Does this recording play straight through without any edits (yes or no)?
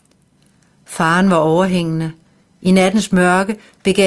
yes